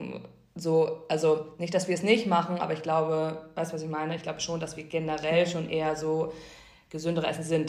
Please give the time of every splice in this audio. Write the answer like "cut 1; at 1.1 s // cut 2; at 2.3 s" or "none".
none